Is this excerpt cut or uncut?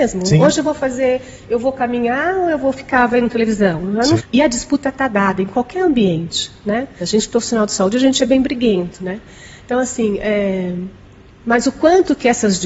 cut